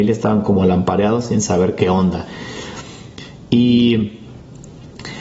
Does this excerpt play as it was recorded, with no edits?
yes; 0 cuts

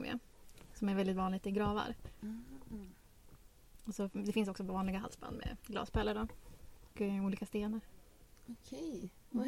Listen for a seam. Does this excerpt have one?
yes; 1 cut; at 6.9 s

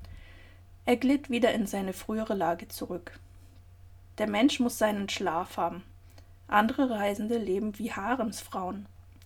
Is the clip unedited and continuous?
no; 1 cut; at 4.1 s

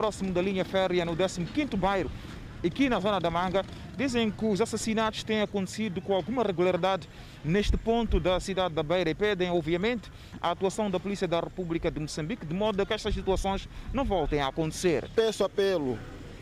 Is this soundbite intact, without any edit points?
yes; 0 cuts

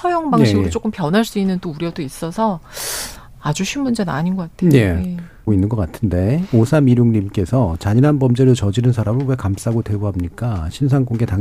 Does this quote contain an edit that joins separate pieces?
yes; 1 cut; at 5.5 s

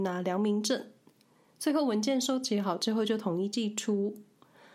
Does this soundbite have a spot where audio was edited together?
no; 0 cuts

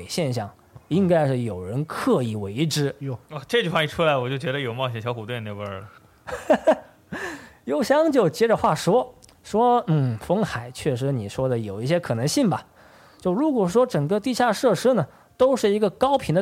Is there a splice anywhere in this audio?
no; 0 cuts

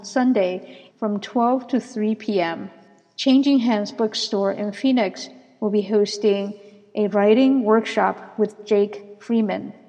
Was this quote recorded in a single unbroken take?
no; 1 cut; at 0.9 s

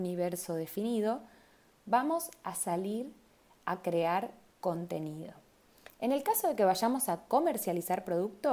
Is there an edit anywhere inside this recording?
yes; 1 cut; at 5.9 s

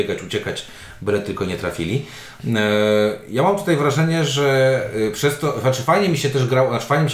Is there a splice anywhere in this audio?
no; 0 cuts

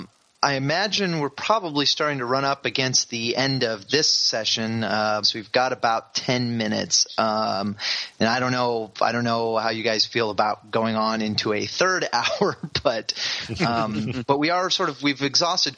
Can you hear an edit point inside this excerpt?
yes; 1 cut; at 5.2 s

